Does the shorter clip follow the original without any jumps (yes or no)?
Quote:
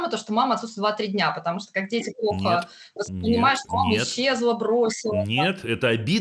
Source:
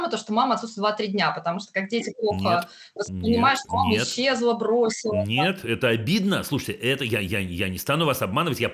yes